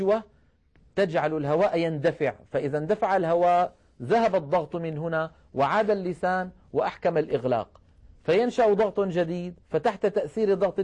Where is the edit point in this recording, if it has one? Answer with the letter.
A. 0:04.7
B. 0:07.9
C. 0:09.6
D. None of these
C